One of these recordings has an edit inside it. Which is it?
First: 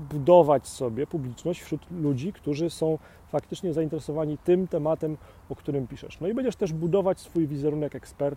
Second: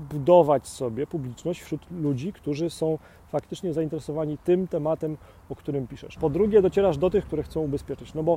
second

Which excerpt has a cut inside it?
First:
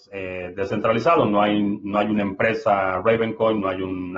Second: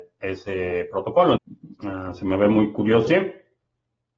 second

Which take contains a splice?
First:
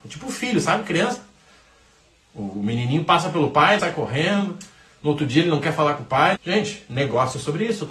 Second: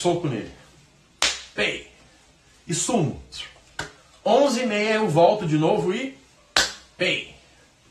first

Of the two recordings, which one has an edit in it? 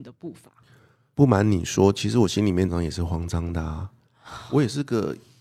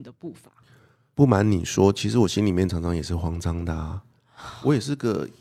first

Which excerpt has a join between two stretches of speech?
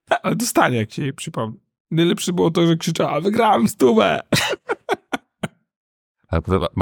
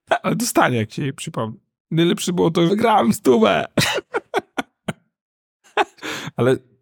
second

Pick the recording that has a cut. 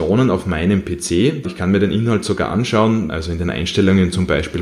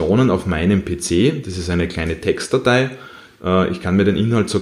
first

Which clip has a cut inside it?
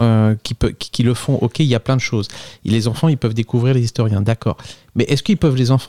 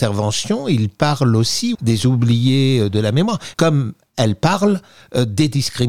second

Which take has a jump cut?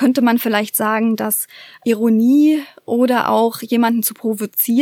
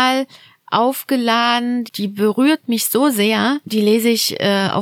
second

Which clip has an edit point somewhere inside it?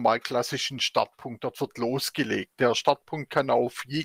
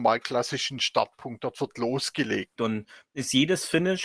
second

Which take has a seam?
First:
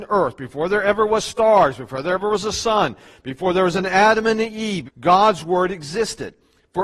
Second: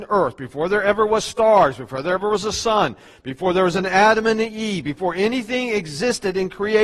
first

